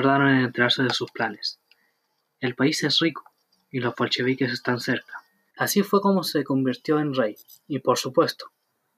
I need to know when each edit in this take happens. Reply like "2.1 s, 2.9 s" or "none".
5.5 s